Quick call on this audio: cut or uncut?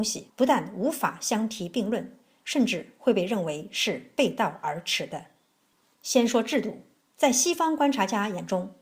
uncut